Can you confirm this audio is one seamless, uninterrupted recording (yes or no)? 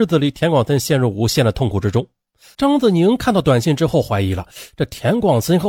no